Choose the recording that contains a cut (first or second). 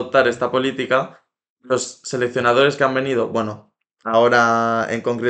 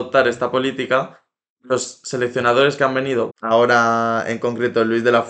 second